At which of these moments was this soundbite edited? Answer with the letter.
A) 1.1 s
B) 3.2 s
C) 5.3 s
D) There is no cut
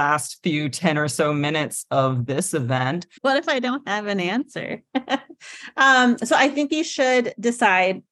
B